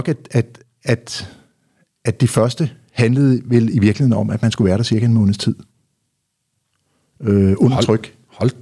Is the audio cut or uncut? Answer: uncut